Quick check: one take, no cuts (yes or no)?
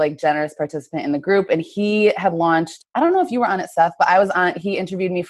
no